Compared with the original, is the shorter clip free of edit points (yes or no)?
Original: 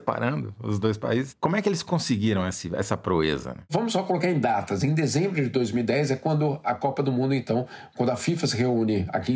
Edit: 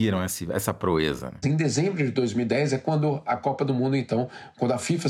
no